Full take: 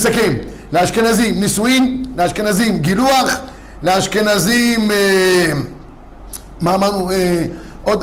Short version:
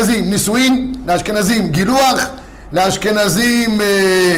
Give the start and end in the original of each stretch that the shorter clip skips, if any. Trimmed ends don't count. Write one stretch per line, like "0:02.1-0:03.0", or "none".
none